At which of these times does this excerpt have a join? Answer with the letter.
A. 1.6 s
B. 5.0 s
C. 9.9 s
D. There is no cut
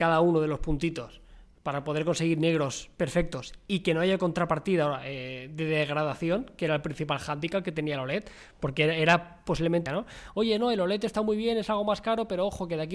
C